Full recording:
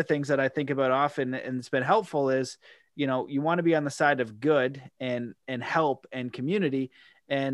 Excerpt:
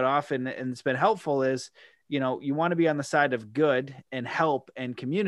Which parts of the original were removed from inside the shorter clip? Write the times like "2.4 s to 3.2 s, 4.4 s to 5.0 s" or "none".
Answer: 4.9 s to 5.4 s